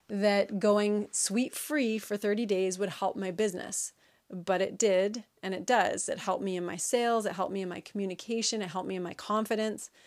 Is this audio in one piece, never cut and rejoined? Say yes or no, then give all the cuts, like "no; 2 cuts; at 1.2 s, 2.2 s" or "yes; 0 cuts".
yes; 0 cuts